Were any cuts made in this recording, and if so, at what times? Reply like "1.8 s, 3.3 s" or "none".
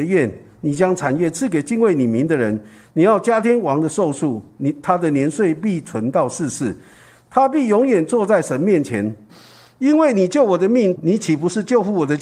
9.3 s, 11.0 s

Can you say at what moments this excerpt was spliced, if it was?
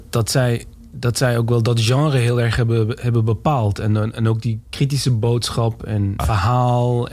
6.2 s

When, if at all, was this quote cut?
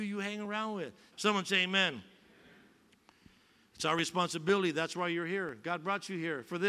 1.1 s

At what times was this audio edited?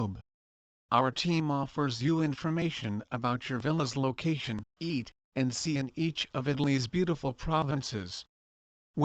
4.7 s

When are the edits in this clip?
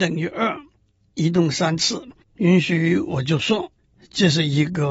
2.2 s

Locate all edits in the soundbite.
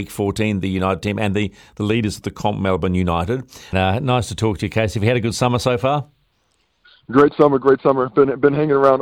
3.7 s

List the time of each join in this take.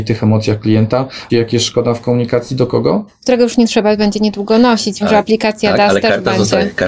1.3 s, 3.1 s, 5.0 s

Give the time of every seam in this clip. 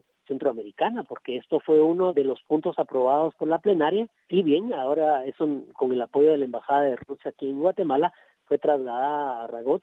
none

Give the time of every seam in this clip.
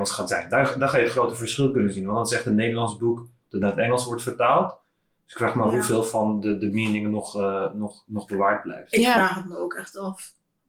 none

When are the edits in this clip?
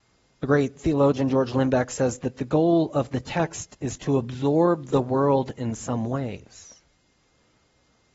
none

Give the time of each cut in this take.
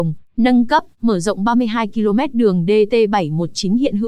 none

